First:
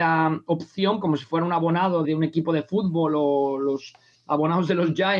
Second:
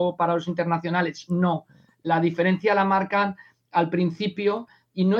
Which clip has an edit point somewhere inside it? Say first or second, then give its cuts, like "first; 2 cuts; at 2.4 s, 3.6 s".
first; 2 cuts; at 1.0 s, 2.0 s